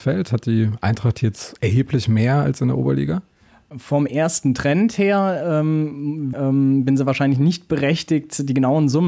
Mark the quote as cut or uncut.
cut